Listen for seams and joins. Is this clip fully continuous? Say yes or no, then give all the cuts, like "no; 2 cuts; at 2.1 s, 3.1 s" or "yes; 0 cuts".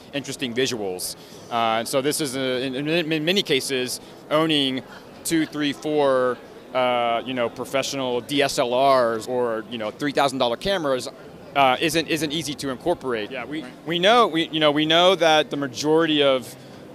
no; 2 cuts; at 9.3 s, 13.3 s